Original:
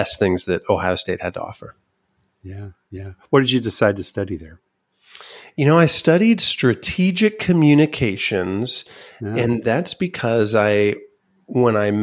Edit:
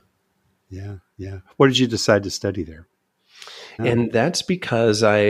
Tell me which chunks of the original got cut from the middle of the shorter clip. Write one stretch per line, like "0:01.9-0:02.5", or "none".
0:05.5-0:09.3